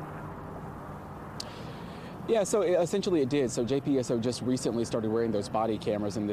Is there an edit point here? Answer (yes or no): no